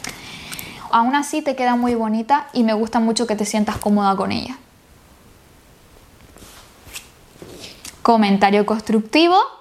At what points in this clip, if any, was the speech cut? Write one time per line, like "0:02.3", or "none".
0:00.9